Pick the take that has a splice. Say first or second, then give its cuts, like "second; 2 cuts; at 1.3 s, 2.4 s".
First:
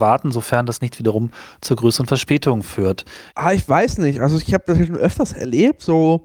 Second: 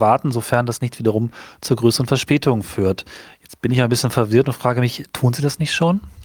first; 1 cut; at 3.3 s